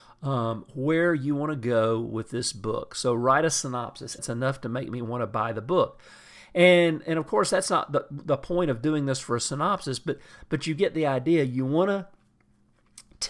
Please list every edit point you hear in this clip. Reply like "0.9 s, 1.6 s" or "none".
4.2 s